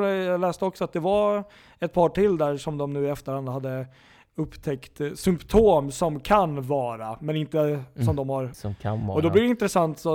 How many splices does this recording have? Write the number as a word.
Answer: one